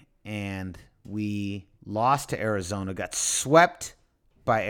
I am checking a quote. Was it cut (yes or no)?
yes